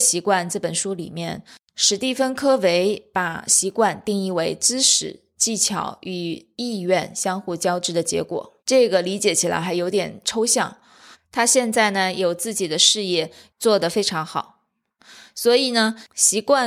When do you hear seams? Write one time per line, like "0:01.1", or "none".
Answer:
0:08.6
0:11.1
0:13.5